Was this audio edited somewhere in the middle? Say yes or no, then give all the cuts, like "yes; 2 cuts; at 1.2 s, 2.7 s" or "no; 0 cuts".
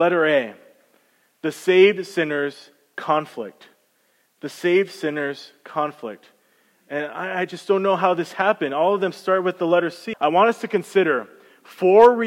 yes; 1 cut; at 10.1 s